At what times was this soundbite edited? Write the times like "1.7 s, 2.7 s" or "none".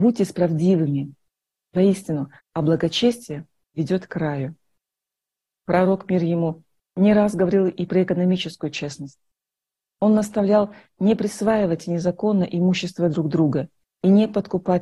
2.4 s